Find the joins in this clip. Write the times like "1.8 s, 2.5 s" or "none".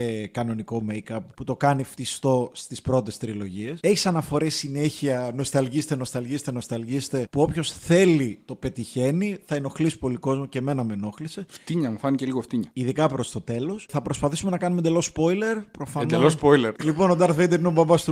none